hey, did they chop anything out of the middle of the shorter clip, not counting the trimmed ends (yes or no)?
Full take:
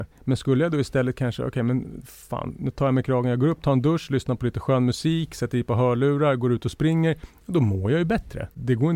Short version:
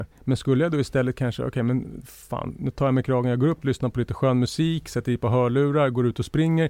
yes